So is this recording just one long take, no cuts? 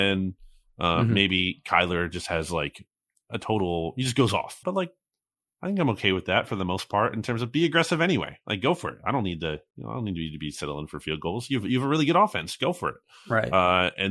no; 1 cut; at 4.6 s

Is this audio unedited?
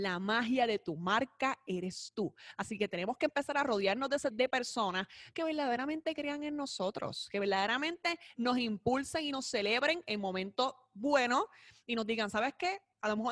no; 1 cut; at 4.3 s

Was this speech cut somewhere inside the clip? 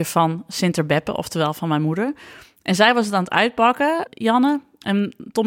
yes; 1 cut; at 4.1 s

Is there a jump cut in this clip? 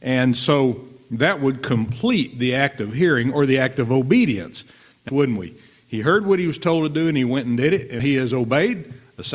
yes; 2 cuts; at 5.1 s, 8.0 s

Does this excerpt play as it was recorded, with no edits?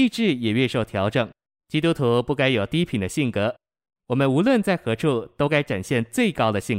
no; 1 cut; at 1.5 s

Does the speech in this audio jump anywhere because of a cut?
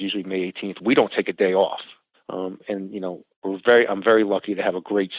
yes; 1 cut; at 2.1 s

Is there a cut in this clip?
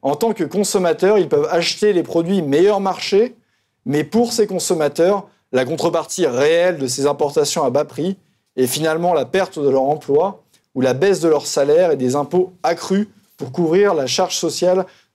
no; 0 cuts

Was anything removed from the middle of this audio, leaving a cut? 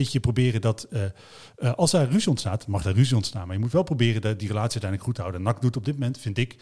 no; 0 cuts

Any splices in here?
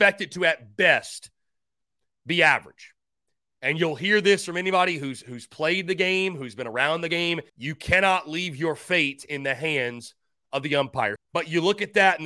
yes; 2 cuts; at 7.5 s, 11.2 s

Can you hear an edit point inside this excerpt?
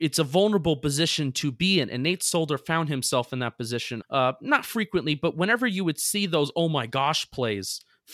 yes; 1 cut; at 4.0 s

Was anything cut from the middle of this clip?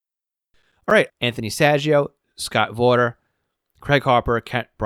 yes; 1 cut; at 1.1 s

